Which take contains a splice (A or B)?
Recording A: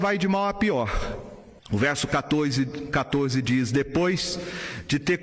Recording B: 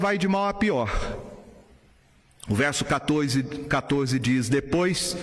A